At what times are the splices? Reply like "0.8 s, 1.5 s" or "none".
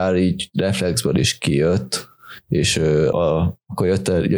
3.1 s